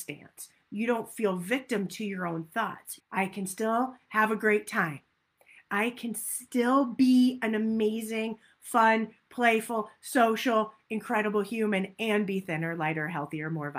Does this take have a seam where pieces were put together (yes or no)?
yes